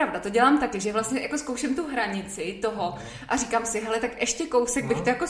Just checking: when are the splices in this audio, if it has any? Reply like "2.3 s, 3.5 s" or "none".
none